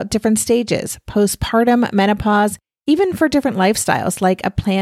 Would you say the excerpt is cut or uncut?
uncut